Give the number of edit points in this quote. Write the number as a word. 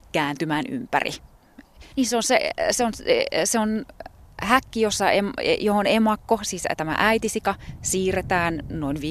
one